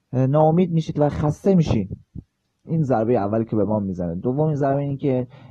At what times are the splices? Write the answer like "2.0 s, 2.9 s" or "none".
2.7 s

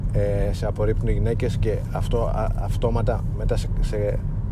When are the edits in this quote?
none

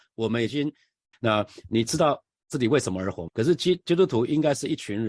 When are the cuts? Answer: 1.1 s, 3.3 s

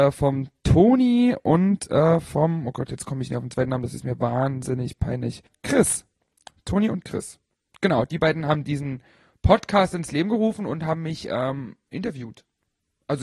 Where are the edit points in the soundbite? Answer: none

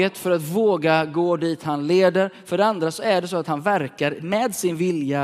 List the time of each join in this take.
none

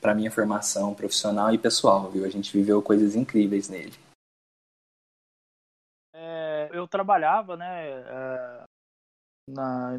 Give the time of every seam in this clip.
6.7 s

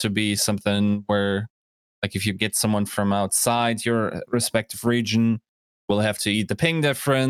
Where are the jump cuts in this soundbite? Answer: none

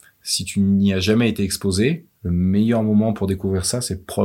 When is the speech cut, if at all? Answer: 2.1 s

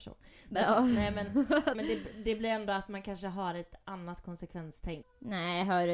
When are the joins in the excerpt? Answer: 1.7 s, 5.0 s

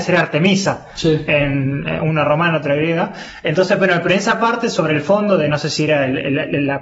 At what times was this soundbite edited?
3.4 s

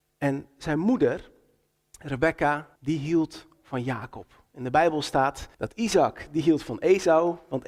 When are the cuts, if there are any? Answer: 2.8 s, 5.5 s

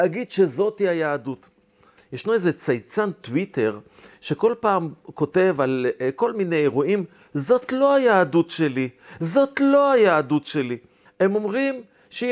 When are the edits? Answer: 2.0 s, 11.1 s

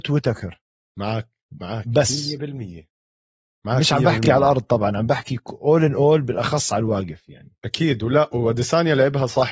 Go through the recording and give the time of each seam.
none

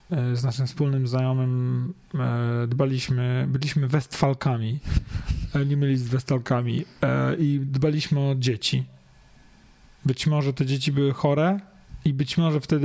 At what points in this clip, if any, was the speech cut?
none

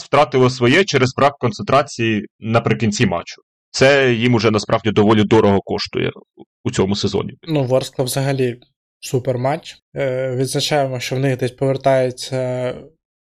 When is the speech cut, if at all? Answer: 9.8 s

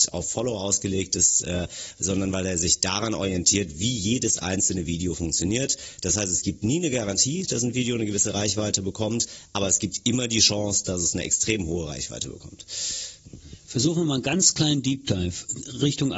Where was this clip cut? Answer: none

